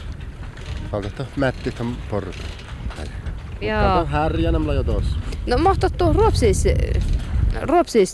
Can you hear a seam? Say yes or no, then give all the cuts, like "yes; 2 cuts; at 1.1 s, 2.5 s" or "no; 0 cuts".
yes; 1 cut; at 3.0 s